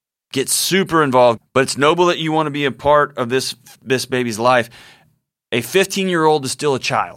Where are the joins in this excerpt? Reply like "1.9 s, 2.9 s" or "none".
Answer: 1.4 s